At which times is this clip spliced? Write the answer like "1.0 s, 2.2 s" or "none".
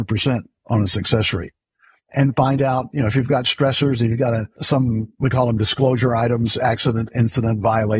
2.0 s

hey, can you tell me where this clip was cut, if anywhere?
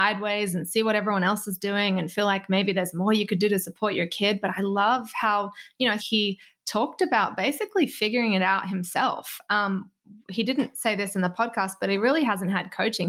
6.0 s

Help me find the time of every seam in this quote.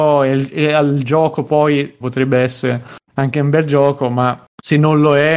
2.0 s

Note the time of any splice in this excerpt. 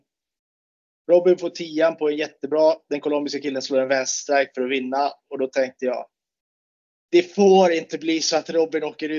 1.0 s

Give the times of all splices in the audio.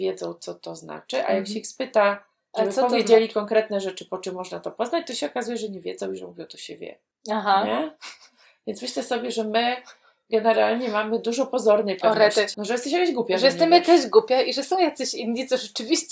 12.5 s

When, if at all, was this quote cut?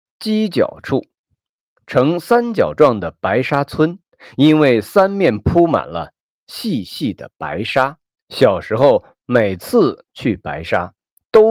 1.7 s, 8.1 s

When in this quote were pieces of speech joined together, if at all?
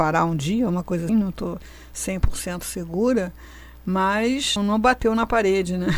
1.1 s, 4.6 s

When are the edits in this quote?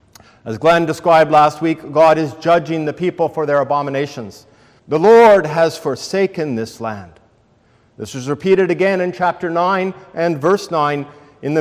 4.8 s

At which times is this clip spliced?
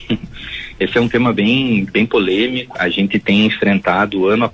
2.7 s

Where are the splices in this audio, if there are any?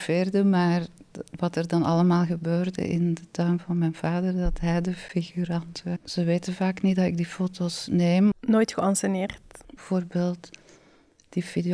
6.0 s, 9.8 s

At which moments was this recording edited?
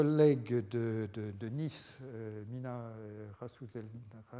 none

